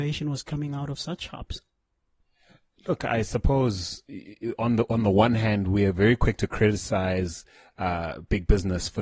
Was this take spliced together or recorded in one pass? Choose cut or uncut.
uncut